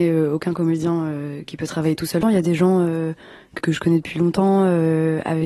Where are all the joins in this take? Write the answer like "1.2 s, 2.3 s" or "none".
2.2 s, 3.6 s